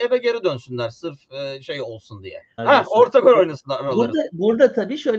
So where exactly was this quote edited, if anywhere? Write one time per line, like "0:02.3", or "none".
0:02.6